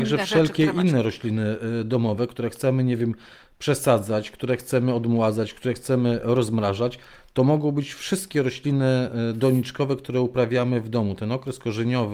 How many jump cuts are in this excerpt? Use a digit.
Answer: 0